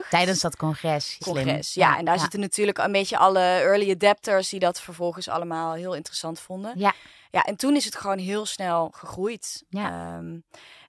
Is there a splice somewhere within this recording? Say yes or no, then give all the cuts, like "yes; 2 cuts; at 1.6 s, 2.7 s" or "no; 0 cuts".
yes; 1 cut; at 1.2 s